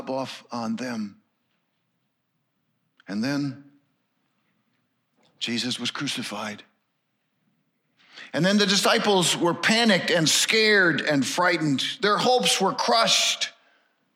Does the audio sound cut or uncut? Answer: uncut